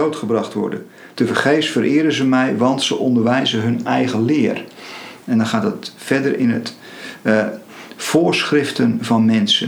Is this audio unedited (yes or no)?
no